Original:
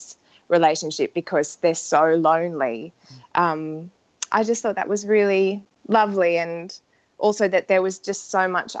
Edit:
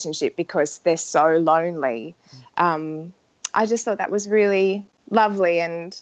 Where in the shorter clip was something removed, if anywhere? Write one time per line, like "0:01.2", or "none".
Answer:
none

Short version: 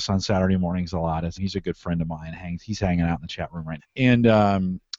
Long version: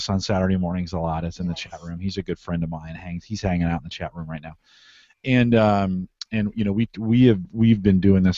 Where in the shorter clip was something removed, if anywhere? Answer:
0:01.4
0:03.8

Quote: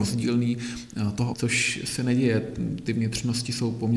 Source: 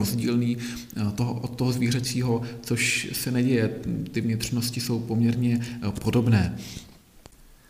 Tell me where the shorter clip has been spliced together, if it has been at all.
0:01.3

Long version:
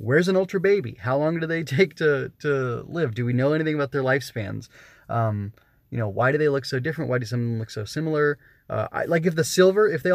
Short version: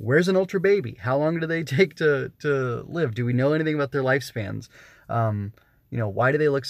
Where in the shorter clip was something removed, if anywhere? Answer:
none

